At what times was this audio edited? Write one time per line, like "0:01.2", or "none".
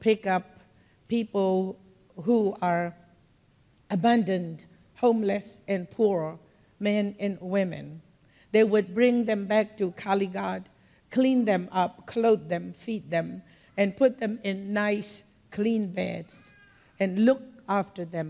none